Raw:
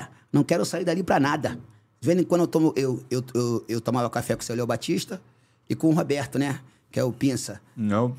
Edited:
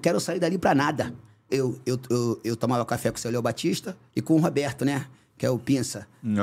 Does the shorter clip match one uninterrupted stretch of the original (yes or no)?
no